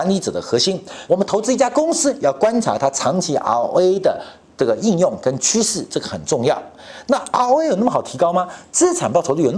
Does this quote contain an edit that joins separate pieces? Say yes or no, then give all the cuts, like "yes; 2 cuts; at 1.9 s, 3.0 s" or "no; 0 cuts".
yes; 1 cut; at 1.1 s